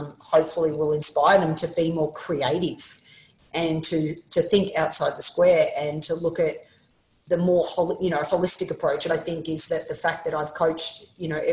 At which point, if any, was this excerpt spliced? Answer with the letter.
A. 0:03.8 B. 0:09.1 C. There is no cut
B